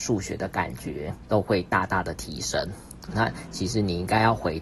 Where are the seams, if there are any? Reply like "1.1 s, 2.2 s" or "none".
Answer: 3.1 s